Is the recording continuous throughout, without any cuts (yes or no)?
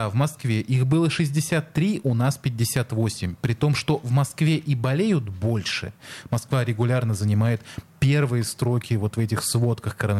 yes